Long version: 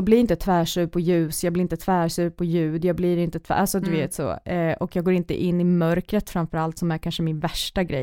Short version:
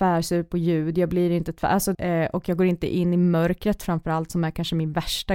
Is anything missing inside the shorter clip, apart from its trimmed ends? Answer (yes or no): yes